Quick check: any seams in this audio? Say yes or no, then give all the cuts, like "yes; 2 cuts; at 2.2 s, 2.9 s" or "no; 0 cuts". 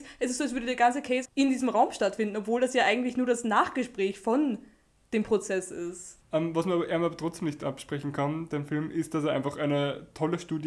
yes; 2 cuts; at 1.2 s, 6.2 s